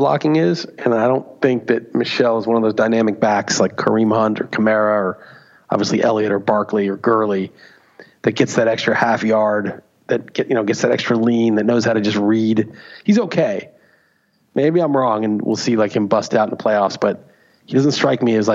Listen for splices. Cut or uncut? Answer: uncut